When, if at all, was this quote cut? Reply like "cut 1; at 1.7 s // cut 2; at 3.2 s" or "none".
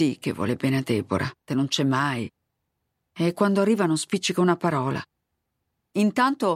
cut 1; at 1.5 s